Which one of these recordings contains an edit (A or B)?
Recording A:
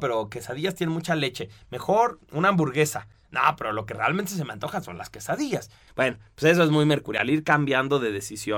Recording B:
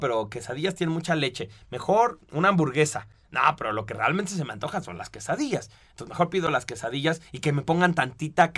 A